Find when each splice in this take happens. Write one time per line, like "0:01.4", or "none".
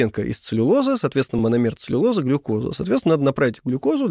none